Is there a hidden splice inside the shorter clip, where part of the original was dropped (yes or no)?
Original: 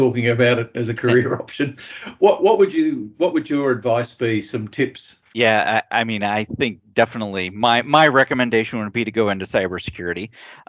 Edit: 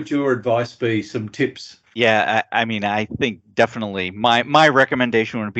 no